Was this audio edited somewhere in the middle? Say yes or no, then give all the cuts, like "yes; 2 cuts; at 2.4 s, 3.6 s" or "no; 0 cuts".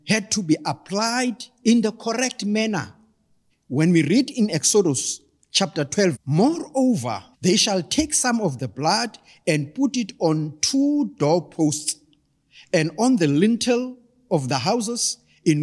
yes; 3 cuts; at 3.5 s, 6.1 s, 7.3 s